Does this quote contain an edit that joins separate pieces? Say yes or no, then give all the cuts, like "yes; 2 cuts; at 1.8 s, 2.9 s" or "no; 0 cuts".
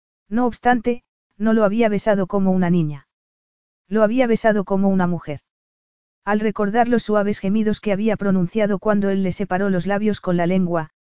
no; 0 cuts